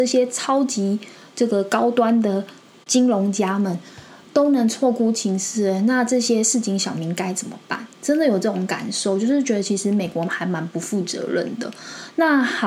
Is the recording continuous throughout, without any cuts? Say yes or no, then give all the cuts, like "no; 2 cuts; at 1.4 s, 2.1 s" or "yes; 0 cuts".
no; 1 cut; at 7.9 s